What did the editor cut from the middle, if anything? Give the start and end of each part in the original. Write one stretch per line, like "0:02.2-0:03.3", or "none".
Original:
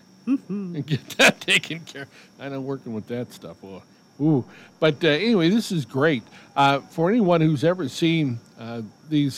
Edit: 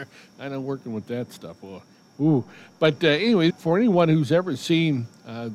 0:05.5-0:06.8